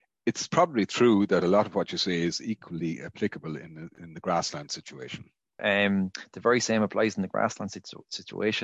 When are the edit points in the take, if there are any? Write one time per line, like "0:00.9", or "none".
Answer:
0:05.6

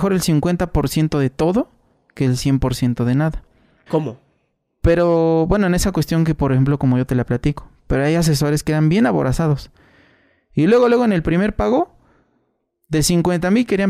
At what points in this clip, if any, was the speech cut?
0:03.9

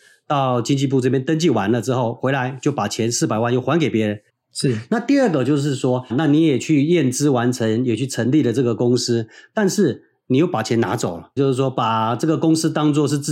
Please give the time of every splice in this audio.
0:04.3
0:06.1
0:11.4

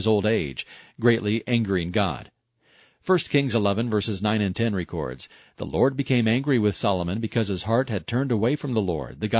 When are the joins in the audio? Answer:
none

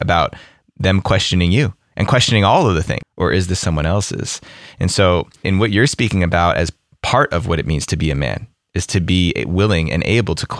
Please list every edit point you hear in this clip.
0:03.0

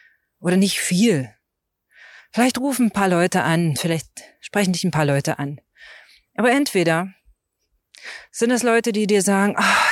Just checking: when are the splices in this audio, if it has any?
none

